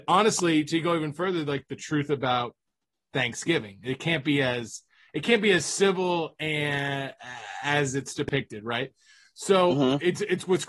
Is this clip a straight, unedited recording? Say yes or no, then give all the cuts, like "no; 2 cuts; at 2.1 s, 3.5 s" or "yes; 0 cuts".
yes; 0 cuts